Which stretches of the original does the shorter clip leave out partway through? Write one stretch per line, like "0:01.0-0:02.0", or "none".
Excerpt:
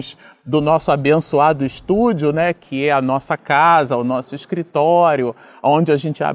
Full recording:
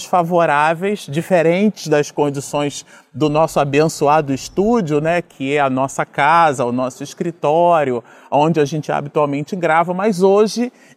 none